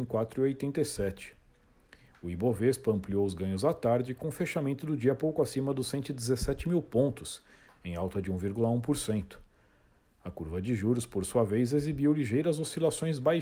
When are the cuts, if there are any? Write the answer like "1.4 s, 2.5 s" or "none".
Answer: none